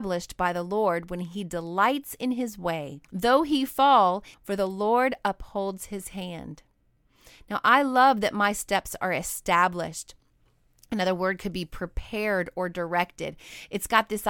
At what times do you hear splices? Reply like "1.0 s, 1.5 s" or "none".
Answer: 3.0 s, 4.3 s